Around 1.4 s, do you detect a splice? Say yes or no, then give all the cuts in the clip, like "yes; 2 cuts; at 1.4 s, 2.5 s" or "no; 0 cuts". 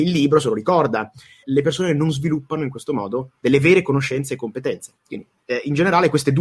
yes; 1 cut; at 1.4 s